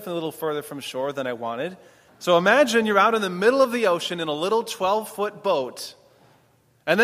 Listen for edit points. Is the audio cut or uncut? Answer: cut